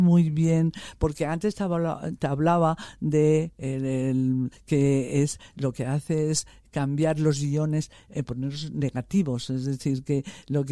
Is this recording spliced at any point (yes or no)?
yes